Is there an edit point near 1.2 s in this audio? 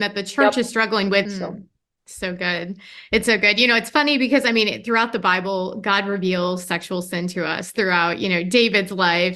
yes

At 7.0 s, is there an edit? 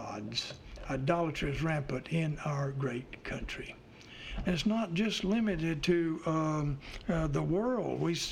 no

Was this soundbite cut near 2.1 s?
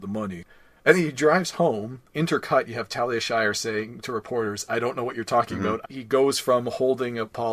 yes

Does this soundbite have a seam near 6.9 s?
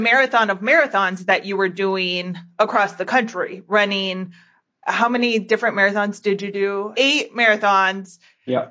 yes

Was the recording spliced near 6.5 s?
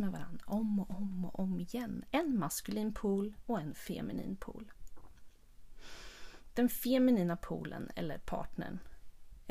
no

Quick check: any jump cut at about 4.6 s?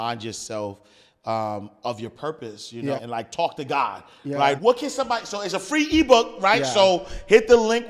yes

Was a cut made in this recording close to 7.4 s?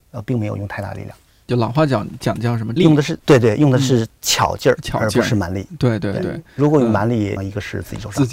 yes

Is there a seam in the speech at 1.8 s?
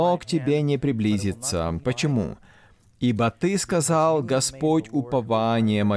yes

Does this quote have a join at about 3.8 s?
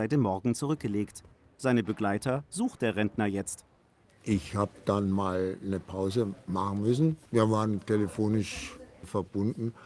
no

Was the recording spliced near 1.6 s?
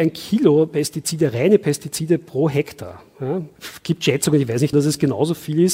no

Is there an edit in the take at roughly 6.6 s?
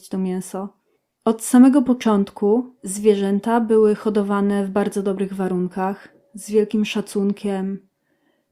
no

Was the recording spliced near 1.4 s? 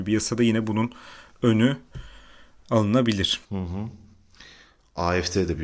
no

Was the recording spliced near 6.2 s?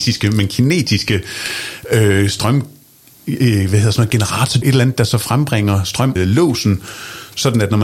yes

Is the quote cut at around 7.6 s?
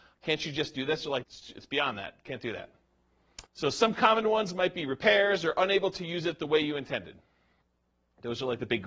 no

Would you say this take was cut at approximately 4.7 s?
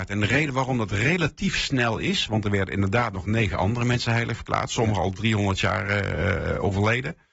no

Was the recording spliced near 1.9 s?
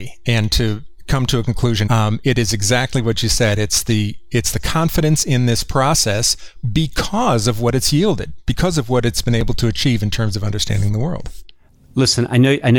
yes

